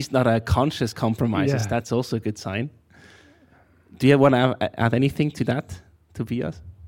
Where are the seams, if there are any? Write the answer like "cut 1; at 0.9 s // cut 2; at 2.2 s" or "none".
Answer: none